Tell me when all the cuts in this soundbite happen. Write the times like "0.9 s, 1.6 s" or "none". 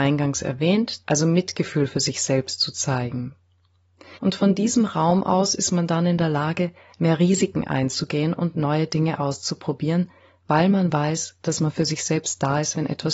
1.0 s, 4.2 s